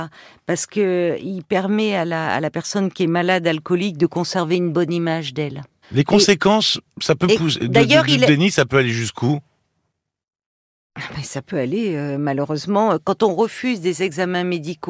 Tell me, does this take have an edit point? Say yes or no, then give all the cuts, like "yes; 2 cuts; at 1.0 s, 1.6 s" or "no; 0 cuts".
yes; 1 cut; at 5.8 s